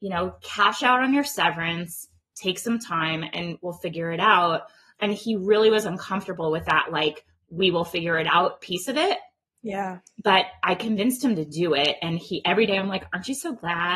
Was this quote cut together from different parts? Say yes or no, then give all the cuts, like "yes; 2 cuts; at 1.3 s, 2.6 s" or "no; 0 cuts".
no; 0 cuts